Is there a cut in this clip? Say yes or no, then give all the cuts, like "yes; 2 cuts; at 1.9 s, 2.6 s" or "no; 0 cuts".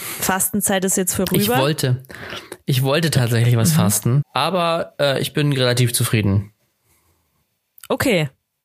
yes; 1 cut; at 4.2 s